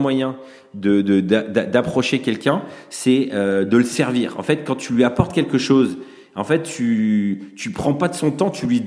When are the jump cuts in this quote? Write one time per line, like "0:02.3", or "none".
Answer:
none